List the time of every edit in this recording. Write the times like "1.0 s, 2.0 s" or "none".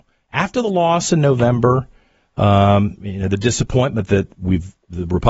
none